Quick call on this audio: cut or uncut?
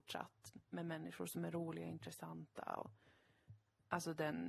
uncut